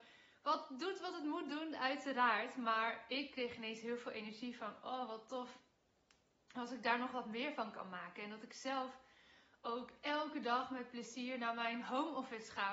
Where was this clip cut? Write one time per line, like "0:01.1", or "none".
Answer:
none